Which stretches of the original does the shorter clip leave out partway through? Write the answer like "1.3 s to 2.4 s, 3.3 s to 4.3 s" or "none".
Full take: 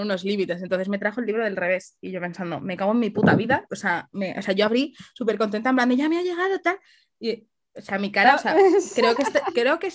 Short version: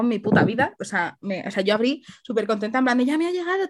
none